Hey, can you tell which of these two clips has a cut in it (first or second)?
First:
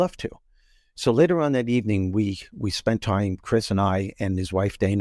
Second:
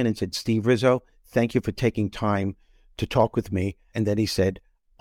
second